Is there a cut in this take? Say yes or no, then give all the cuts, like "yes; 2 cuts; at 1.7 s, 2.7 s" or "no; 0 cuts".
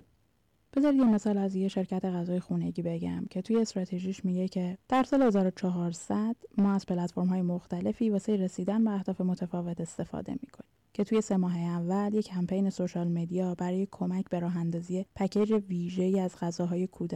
yes; 1 cut; at 4.8 s